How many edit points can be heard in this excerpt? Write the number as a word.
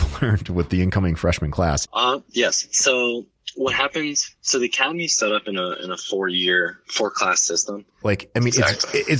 two